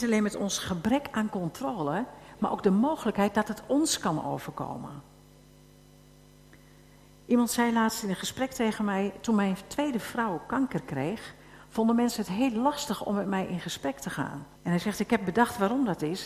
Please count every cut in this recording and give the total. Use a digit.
1